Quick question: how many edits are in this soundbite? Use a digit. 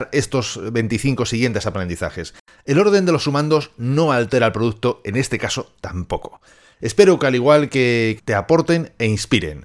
1